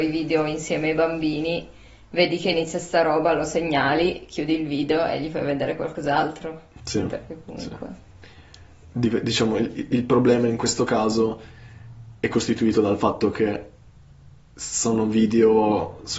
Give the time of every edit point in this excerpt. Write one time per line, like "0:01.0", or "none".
0:06.8

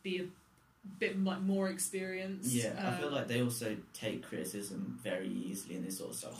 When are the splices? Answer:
none

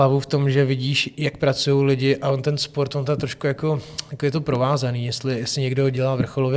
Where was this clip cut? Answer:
none

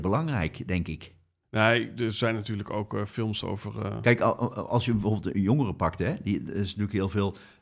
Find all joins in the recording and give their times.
0:01.4

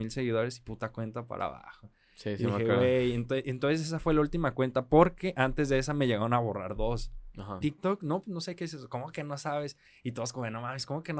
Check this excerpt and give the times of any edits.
0:07.6

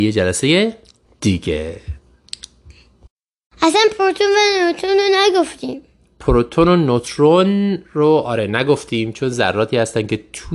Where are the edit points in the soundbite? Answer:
0:01.1

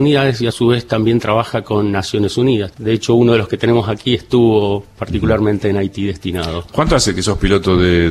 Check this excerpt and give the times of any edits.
0:02.7

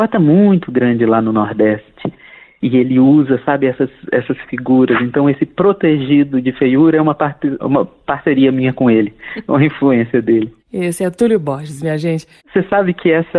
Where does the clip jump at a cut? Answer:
0:07.6
0:10.6
0:12.4

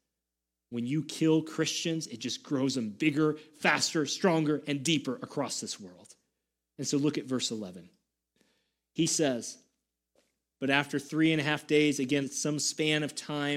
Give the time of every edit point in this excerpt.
0:03.5
0:10.5
0:12.2

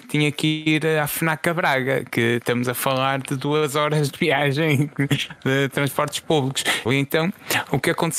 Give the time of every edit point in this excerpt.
0:06.9

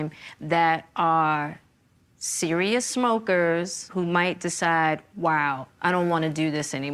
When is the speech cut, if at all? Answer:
0:03.9

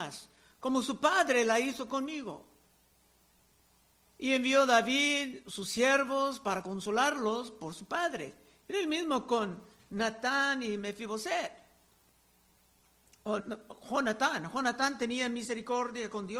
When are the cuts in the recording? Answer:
0:13.4

